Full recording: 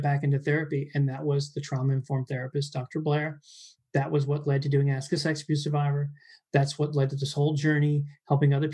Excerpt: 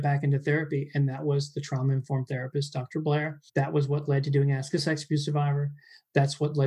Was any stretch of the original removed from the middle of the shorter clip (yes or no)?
yes